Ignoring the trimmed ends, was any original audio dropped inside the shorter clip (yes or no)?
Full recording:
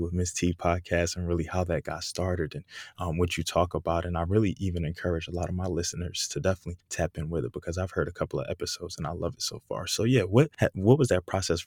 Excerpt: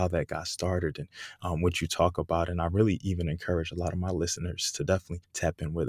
no